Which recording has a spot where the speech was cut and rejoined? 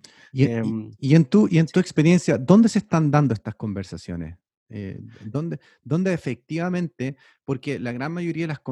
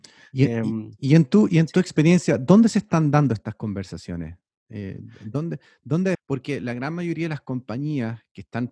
second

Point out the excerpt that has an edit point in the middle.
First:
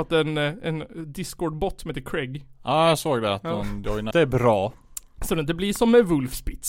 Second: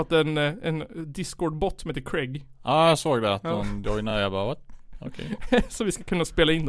first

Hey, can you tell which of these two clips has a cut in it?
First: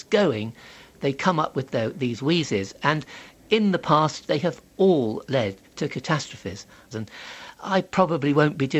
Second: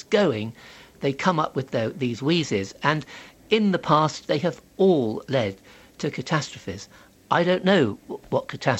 first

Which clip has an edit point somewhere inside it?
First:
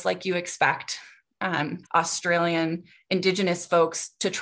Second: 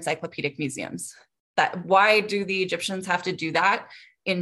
first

